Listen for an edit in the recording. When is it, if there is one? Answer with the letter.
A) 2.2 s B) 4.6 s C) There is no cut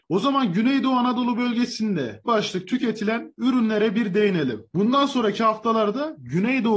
A